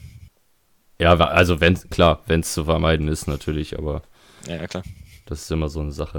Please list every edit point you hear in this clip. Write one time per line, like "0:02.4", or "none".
0:01.0